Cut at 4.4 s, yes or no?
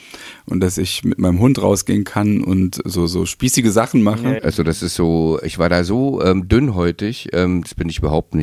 yes